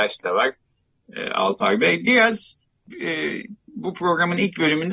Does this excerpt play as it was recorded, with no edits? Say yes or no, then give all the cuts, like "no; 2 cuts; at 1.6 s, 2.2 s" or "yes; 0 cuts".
yes; 0 cuts